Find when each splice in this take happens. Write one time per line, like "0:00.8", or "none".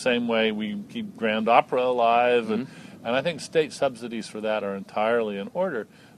none